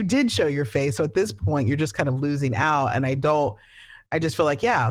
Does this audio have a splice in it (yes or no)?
no